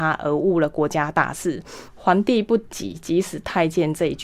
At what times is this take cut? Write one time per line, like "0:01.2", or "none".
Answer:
0:01.9